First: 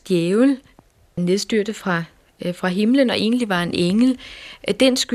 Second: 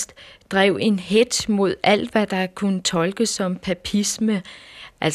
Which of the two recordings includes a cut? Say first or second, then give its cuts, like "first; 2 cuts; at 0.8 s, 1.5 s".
first; 1 cut; at 1.2 s